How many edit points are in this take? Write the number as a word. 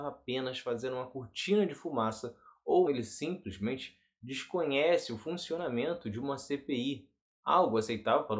one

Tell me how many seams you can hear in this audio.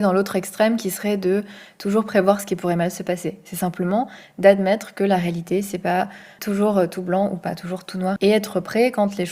two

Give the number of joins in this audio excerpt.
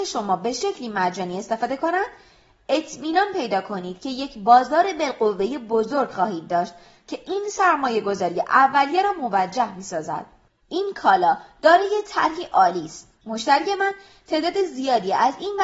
two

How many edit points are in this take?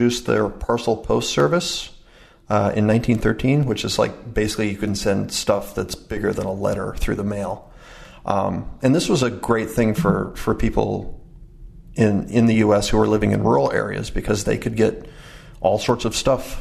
zero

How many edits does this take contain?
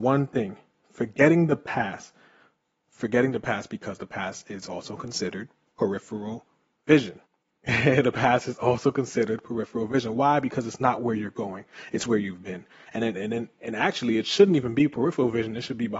one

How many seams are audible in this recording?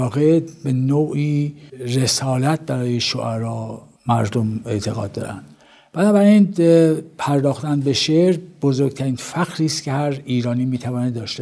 one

